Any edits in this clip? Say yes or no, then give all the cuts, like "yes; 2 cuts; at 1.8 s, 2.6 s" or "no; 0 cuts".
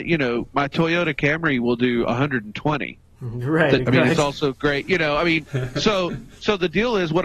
yes; 1 cut; at 3.9 s